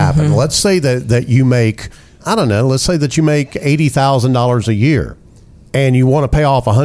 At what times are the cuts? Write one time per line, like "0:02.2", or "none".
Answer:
0:02.2